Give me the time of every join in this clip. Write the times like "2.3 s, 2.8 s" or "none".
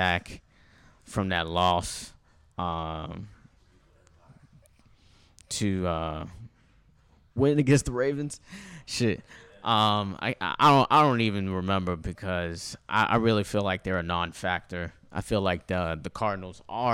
7.4 s